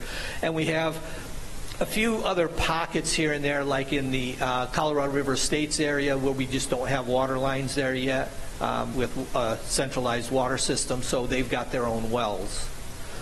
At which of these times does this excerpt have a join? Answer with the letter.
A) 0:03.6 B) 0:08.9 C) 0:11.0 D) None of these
B